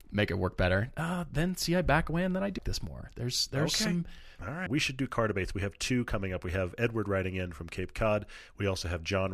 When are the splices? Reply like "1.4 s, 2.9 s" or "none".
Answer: 2.6 s, 4.7 s